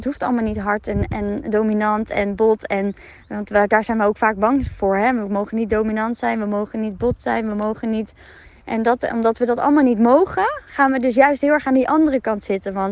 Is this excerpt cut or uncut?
uncut